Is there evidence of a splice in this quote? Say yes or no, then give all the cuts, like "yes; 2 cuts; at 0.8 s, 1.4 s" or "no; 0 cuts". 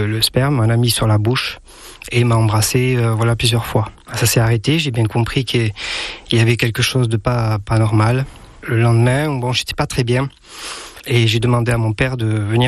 no; 0 cuts